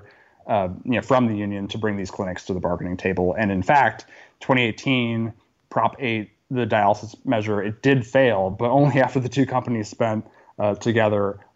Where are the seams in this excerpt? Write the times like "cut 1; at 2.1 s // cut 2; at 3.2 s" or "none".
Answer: none